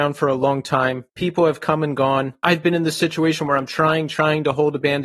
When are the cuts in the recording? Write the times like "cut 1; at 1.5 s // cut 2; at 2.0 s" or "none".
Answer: cut 1; at 1.1 s // cut 2; at 2.4 s